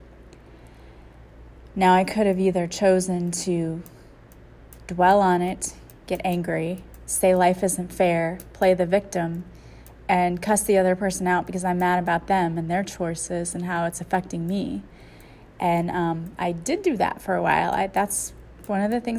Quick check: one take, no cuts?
no; 1 cut; at 6.0 s

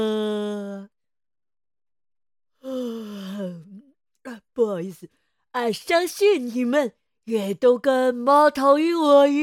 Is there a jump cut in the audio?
no; 0 cuts

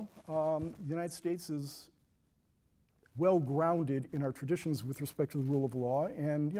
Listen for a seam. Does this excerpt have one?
yes; 1 cut; at 3.1 s

